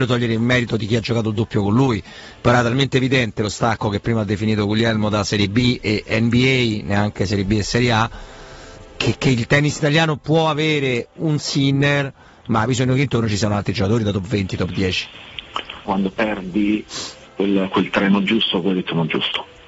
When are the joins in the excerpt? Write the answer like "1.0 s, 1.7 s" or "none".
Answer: 15.9 s